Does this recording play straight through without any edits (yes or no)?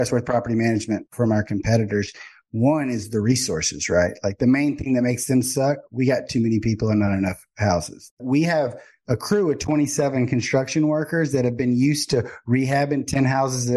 yes